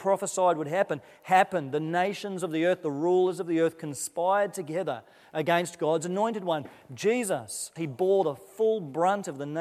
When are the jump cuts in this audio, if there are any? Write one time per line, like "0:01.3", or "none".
0:07.8